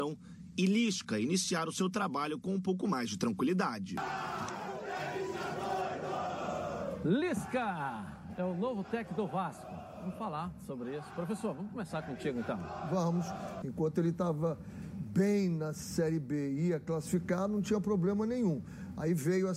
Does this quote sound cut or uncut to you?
cut